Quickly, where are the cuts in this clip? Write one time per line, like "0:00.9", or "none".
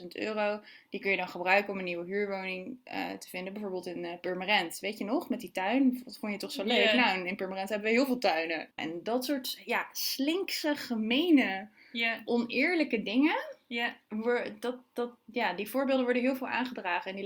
0:08.8

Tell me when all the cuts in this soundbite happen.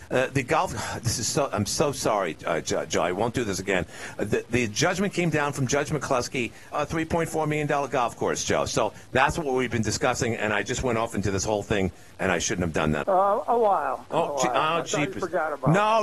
0:06.7
0:13.0

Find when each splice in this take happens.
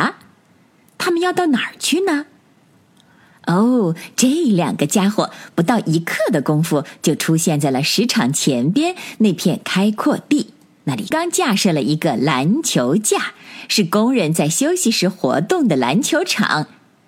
0:11.1

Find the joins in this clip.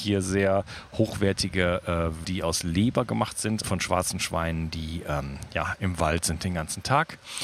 0:02.2
0:03.6

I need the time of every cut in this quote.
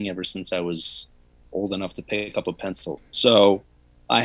0:03.0

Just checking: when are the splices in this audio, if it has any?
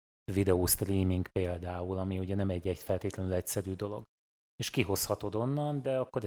none

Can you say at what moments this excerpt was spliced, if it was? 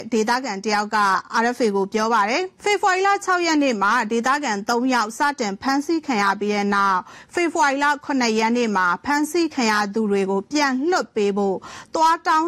0:02.6

